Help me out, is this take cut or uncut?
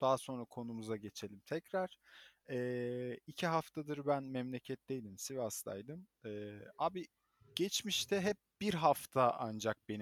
uncut